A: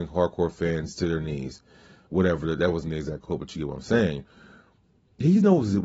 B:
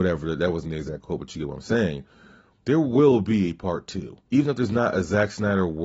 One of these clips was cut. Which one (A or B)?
B